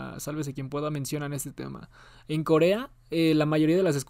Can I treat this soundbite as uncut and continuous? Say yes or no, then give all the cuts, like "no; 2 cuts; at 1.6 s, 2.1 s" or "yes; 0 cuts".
yes; 0 cuts